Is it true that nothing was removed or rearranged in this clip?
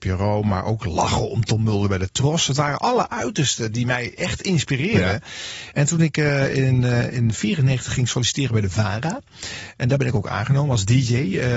no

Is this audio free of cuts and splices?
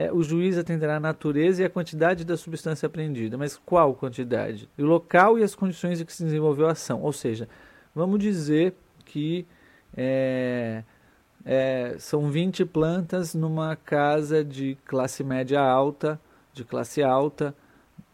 no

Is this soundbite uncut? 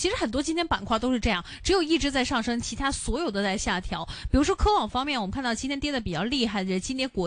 yes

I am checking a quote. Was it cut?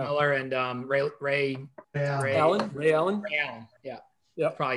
yes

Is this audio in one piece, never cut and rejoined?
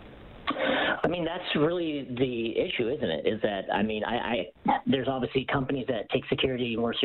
yes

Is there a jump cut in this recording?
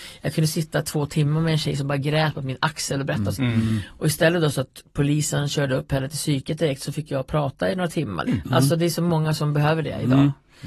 yes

